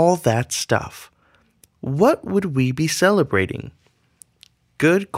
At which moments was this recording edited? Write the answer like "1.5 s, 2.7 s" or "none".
1.7 s